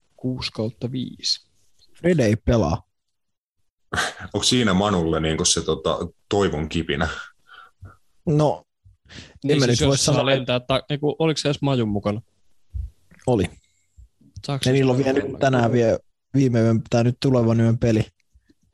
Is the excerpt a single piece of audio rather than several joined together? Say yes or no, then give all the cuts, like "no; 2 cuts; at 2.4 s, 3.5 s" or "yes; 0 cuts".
yes; 0 cuts